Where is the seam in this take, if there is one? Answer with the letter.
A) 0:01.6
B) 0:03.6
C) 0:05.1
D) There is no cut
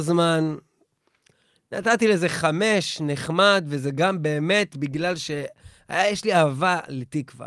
D